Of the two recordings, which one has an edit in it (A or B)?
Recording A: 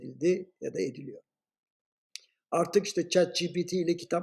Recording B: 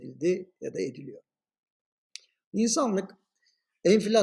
B